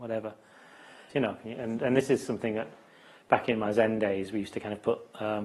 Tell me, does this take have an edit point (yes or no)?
yes